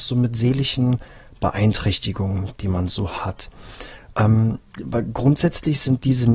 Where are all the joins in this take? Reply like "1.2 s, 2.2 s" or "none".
none